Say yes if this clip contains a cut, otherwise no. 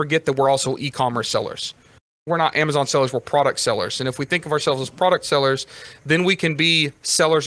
no